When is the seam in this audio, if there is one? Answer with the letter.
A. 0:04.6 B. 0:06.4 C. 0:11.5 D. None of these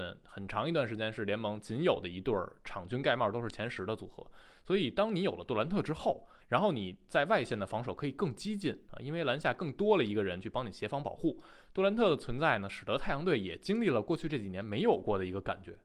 B